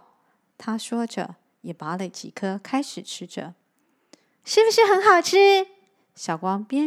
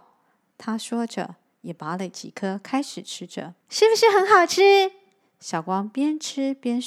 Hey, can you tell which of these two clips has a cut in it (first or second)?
second